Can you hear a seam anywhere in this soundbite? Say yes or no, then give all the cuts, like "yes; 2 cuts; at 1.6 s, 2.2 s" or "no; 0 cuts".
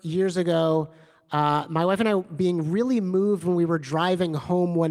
no; 0 cuts